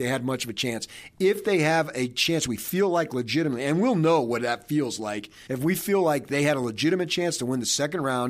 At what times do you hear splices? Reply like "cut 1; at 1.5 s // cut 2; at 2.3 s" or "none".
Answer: cut 1; at 5.5 s